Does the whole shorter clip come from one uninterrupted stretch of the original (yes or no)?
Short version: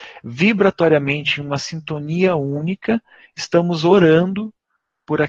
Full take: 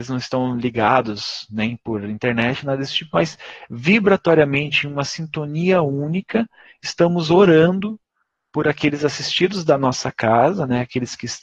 yes